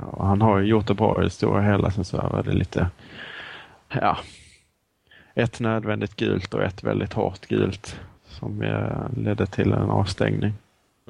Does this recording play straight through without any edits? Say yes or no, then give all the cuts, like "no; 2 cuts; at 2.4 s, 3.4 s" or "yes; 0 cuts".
no; 2 cuts; at 3.9 s, 8.1 s